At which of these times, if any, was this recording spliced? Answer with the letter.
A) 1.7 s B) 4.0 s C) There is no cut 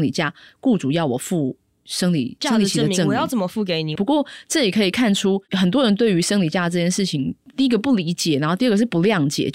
B